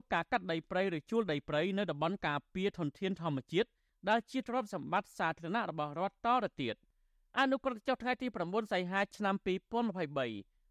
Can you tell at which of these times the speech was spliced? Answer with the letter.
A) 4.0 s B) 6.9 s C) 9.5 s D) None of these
D